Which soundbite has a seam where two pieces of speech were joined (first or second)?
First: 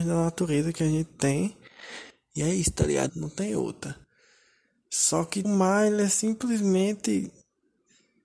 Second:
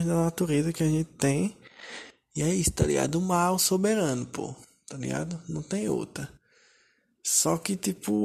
first